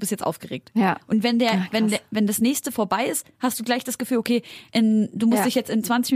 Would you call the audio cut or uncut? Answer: uncut